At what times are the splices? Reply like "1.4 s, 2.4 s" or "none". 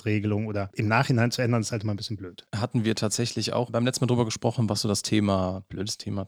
none